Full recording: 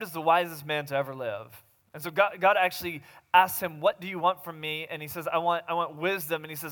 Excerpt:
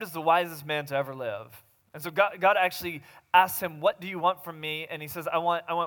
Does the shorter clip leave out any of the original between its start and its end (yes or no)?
no